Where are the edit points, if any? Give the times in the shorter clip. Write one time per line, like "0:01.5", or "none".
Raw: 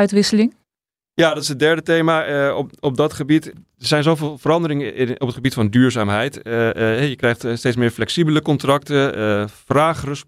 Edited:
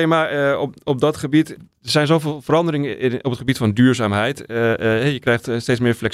none